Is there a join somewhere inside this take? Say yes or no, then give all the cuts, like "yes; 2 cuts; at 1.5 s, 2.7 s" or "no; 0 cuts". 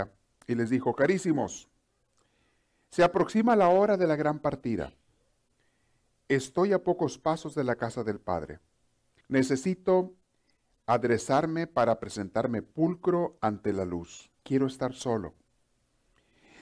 yes; 2 cuts; at 9.2 s, 14.4 s